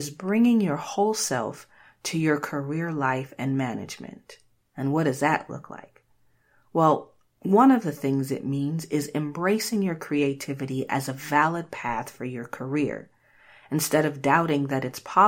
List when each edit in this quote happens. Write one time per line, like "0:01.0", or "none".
none